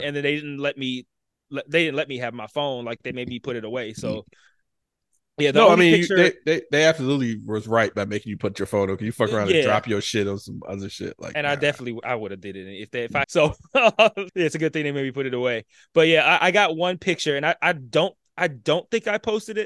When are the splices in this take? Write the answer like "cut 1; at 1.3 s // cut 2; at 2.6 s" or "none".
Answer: cut 1; at 13.2 s // cut 2; at 14.3 s